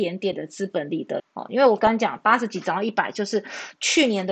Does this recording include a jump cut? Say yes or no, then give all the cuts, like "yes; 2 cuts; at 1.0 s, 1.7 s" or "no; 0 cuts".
yes; 1 cut; at 1.2 s